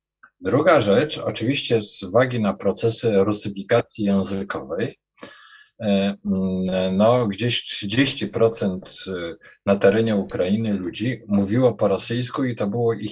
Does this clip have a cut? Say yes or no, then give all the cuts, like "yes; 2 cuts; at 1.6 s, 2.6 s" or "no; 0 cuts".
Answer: no; 0 cuts